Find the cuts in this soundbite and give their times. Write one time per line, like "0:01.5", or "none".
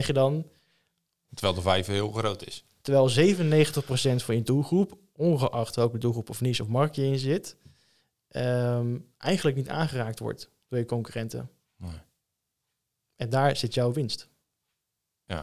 0:01.3